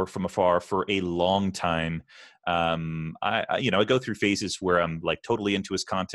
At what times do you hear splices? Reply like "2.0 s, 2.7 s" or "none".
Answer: none